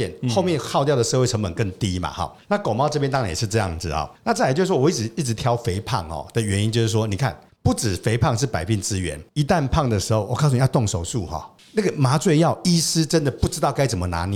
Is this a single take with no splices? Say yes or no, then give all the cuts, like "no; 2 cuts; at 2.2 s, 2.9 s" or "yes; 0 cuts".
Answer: yes; 0 cuts